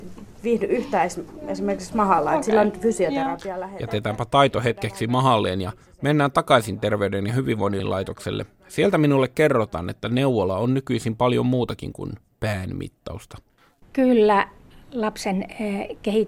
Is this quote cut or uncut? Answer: uncut